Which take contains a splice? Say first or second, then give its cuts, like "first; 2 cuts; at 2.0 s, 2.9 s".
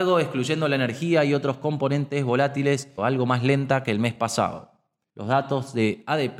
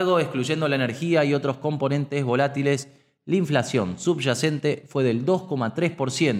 first; 2 cuts; at 3.0 s, 5.1 s